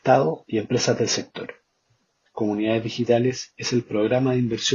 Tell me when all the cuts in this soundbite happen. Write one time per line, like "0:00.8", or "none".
0:02.3